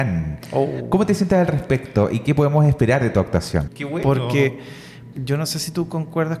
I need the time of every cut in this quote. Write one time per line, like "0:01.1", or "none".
0:03.7
0:05.1